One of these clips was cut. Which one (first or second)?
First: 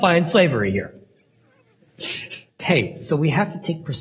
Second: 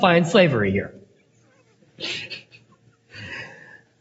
first